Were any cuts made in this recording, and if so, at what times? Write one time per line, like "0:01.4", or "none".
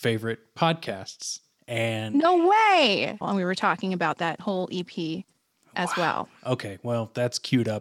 0:03.2